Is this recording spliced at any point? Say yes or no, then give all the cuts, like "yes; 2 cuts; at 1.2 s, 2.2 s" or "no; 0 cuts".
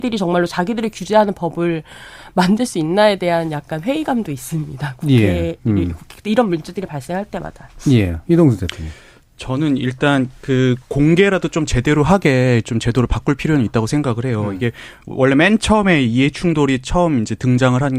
no; 0 cuts